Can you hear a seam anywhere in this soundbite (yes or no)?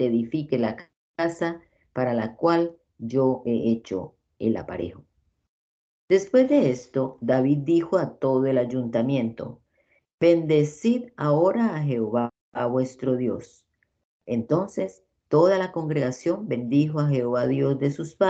no